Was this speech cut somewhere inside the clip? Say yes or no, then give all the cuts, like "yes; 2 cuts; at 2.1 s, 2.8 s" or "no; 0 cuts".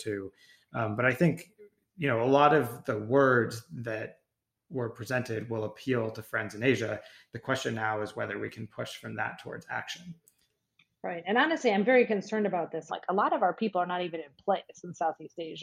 yes; 1 cut; at 12.9 s